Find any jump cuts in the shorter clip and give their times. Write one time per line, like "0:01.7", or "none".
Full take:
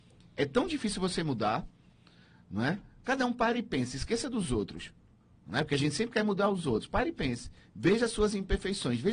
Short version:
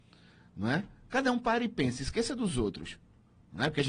none